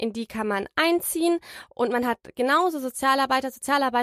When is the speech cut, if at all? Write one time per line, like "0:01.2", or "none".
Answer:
none